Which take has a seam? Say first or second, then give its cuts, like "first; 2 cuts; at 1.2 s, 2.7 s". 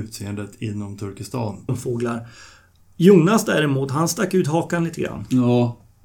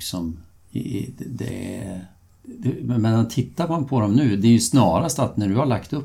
first; 1 cut; at 1.7 s